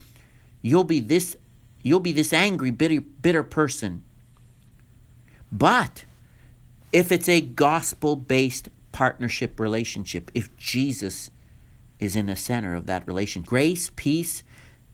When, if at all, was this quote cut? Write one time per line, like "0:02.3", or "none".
0:13.5